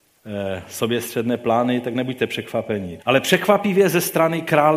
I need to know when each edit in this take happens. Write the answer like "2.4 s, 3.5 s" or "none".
3.0 s